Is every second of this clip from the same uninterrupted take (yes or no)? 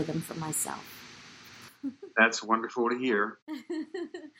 yes